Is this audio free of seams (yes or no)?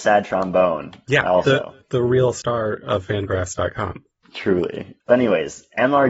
yes